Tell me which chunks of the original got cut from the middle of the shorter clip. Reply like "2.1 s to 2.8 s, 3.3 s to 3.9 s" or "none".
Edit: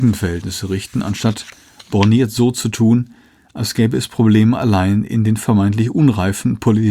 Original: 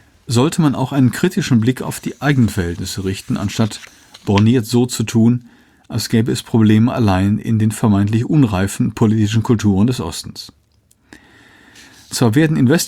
none